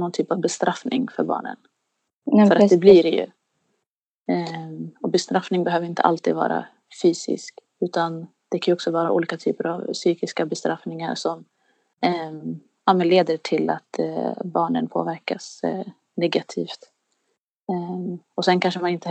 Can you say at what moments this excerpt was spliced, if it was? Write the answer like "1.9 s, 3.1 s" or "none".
none